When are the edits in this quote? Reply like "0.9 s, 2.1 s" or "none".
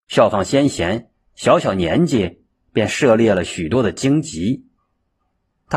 none